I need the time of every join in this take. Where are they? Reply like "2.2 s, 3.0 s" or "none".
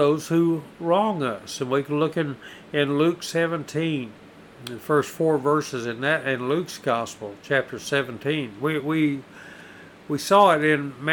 none